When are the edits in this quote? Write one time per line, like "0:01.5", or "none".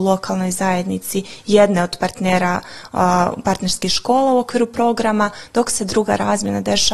none